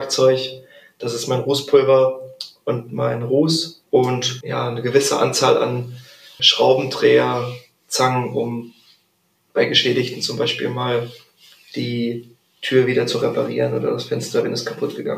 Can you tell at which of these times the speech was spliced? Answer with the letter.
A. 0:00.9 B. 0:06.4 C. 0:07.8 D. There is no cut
B